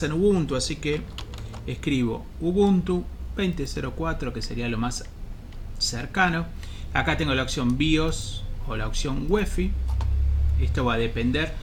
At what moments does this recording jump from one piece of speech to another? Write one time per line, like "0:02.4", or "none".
none